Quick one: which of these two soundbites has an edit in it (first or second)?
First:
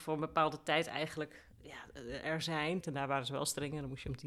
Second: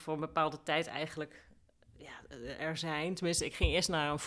first